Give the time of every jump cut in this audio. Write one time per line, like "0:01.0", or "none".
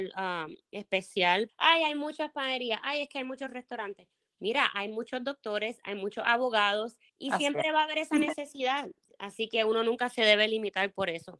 0:01.5
0:07.1